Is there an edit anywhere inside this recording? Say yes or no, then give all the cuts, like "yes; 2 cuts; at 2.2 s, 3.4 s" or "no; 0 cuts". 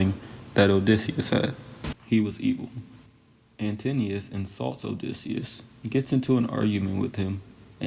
yes; 1 cut; at 1.9 s